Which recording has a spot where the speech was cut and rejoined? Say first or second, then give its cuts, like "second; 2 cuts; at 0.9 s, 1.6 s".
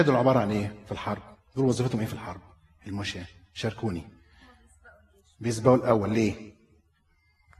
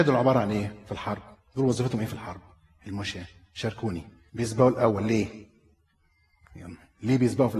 second; 1 cut; at 4.3 s